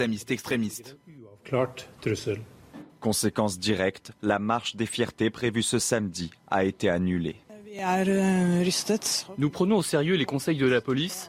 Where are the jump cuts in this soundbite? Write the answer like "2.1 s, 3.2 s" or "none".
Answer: none